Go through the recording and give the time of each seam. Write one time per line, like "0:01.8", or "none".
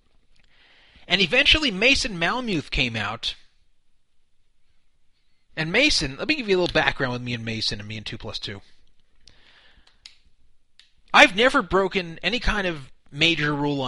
none

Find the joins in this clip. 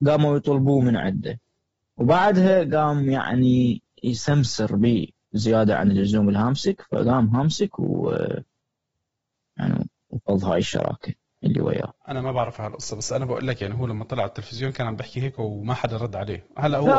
none

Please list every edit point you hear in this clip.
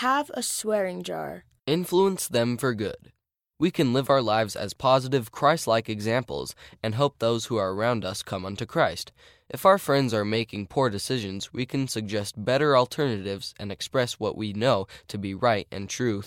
0:01.6
0:03.5

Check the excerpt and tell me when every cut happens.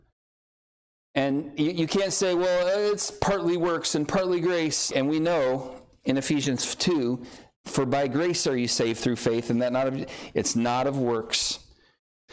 0:04.9

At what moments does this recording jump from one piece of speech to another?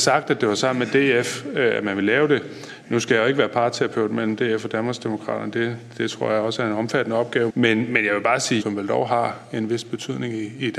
0:07.5
0:08.6

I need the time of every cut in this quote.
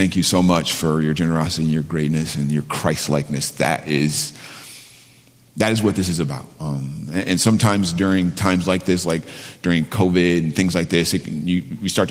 0:06.6

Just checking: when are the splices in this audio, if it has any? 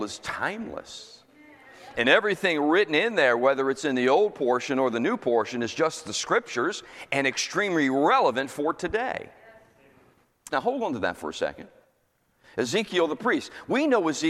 0:10.5

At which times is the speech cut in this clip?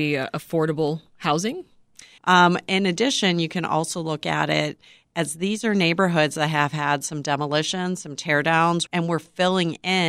0:02.2
0:08.9

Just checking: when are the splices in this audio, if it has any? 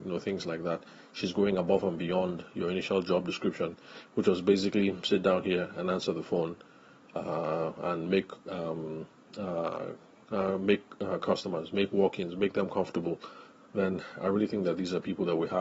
0:13.7

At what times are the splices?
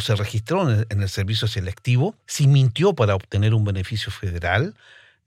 0:02.2

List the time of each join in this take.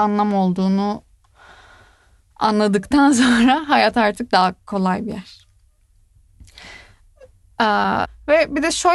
0:08.0

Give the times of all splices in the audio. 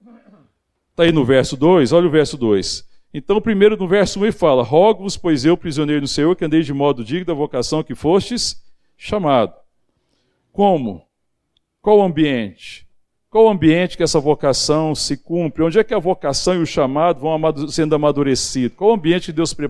none

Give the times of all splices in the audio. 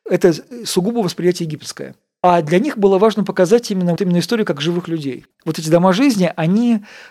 0:04.0
0:05.3

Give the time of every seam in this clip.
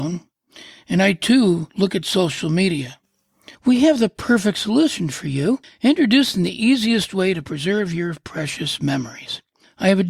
0:03.5

